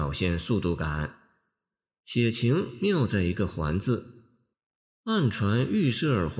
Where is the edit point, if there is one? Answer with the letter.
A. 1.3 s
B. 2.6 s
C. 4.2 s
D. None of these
D